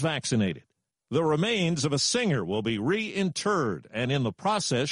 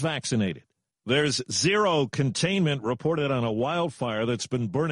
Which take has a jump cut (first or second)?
first